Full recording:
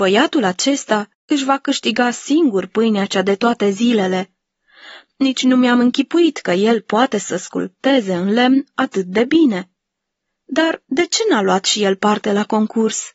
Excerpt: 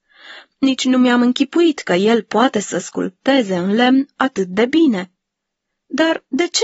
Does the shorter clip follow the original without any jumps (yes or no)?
yes